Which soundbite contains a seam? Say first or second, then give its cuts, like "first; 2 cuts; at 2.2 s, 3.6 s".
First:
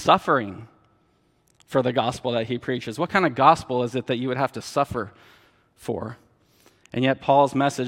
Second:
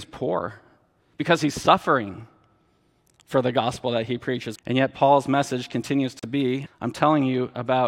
second; 3 cuts; at 1.1 s, 4.6 s, 6.7 s